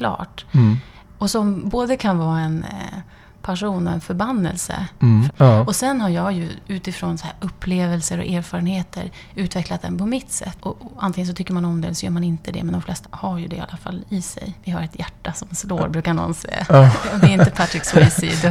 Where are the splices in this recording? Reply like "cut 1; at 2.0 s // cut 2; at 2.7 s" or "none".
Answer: cut 1; at 5.3 s // cut 2; at 13.0 s